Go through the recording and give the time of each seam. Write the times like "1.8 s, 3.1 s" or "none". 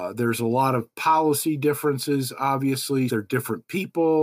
3.1 s